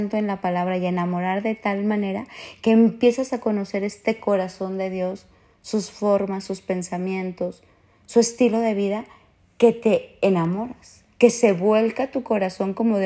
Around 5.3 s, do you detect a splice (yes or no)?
no